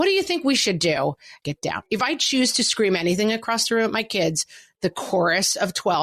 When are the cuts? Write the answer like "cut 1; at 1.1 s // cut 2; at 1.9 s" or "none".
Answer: cut 1; at 1.4 s